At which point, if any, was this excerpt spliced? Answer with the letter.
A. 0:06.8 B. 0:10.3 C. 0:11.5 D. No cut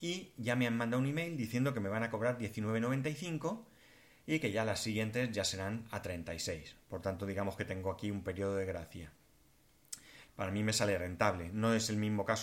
B